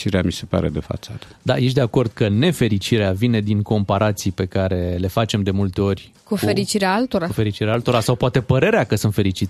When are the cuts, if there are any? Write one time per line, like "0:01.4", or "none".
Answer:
none